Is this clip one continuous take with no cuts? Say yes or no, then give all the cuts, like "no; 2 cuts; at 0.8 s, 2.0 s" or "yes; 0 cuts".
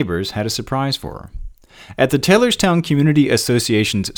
yes; 0 cuts